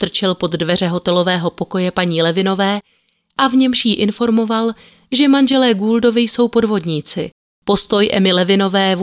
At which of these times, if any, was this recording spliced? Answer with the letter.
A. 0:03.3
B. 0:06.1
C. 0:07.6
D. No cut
C